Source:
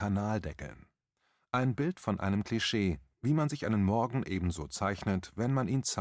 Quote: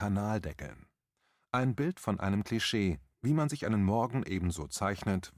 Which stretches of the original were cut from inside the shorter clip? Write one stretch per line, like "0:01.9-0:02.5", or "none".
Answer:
none